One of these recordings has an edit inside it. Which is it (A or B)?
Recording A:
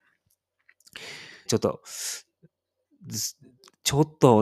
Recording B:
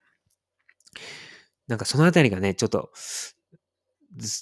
A